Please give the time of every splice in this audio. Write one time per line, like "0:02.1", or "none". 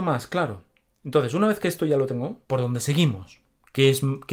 0:02.4